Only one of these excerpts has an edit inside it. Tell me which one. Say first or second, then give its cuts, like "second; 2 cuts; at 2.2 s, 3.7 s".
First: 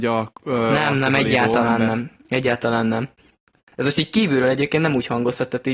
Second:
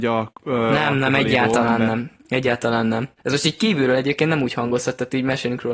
second; 1 cut; at 3.2 s